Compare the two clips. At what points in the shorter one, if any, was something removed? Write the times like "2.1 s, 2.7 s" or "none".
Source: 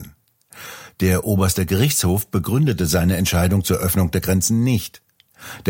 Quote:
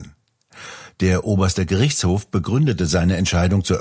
none